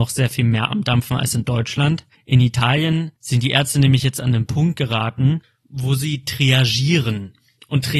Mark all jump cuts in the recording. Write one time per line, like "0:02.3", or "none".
0:03.2